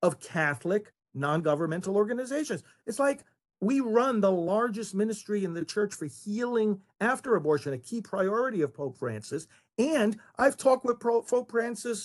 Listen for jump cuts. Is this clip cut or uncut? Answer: uncut